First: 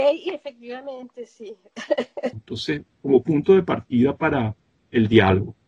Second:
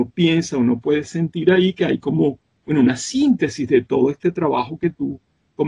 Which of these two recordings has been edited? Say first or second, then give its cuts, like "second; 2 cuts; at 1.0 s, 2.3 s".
first; 1 cut; at 2.3 s